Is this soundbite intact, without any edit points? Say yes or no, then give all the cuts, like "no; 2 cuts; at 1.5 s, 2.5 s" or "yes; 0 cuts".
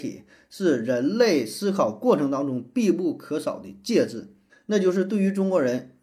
no; 1 cut; at 4.5 s